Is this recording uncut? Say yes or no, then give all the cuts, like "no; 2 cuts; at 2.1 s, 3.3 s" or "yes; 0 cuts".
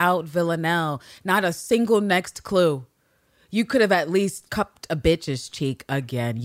no; 1 cut; at 4.5 s